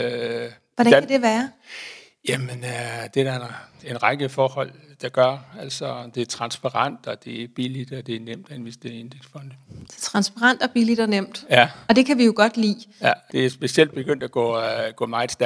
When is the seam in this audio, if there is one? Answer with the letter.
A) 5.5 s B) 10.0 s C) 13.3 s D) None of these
C